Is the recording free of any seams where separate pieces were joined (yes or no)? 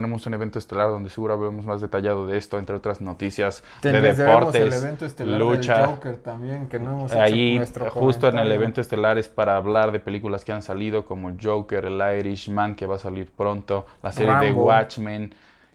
yes